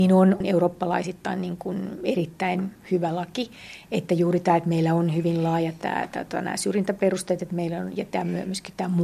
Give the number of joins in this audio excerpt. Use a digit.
0